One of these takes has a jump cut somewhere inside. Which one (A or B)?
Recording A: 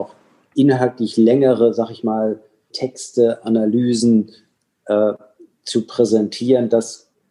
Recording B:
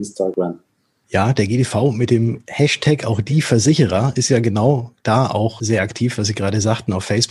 A